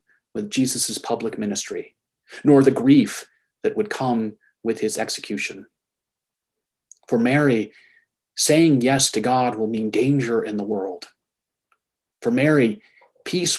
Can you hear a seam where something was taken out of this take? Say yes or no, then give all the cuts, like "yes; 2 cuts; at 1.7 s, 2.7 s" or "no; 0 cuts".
no; 0 cuts